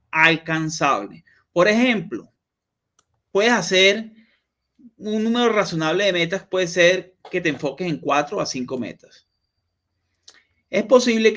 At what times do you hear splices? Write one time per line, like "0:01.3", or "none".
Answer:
0:03.3